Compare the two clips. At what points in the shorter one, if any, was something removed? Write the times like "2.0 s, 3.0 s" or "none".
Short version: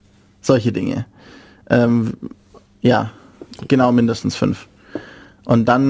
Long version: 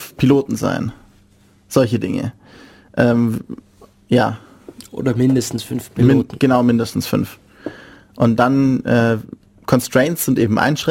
3.6 s